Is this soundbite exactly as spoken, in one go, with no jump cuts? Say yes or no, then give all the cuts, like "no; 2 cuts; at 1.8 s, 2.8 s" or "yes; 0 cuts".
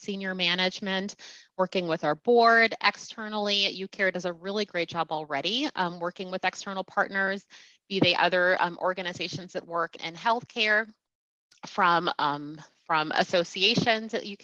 no; 1 cut; at 10.0 s